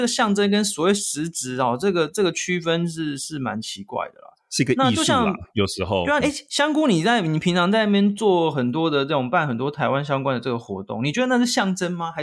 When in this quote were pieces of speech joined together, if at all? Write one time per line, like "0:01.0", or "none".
0:06.2